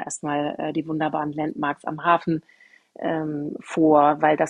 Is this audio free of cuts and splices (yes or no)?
yes